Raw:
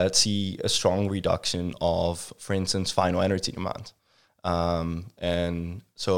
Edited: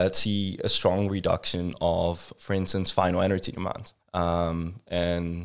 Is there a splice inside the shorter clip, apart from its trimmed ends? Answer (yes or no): yes